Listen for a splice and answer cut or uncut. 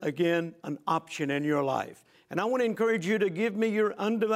cut